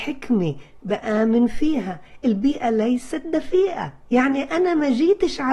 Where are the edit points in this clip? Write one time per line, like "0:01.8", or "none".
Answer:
0:04.0